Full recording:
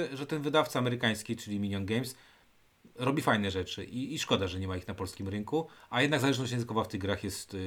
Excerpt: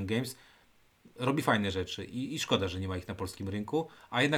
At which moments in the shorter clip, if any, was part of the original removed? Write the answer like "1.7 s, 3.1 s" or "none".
none